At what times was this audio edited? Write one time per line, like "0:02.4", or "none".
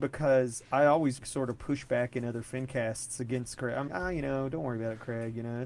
0:01.2
0:03.9